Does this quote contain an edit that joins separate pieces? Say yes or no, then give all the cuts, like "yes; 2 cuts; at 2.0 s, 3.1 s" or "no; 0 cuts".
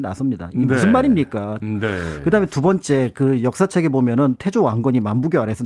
yes; 1 cut; at 1.6 s